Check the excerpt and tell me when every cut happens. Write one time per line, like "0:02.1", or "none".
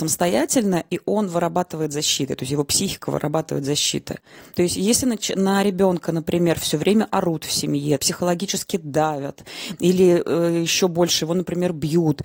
0:04.5
0:08.0